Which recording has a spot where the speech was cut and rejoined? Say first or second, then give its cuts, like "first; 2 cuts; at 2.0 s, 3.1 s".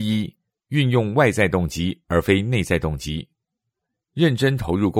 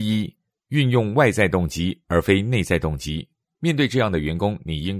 second; 1 cut; at 3.5 s